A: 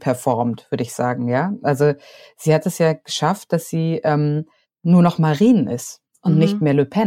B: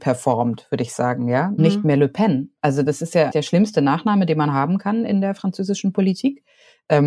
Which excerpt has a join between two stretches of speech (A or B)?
B